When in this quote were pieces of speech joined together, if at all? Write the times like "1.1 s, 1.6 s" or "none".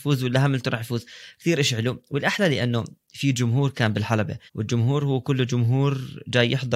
4.5 s